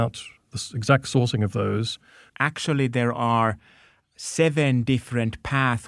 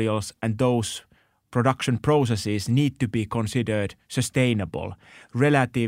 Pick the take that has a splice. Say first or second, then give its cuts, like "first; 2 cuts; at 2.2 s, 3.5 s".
first; 1 cut; at 2.3 s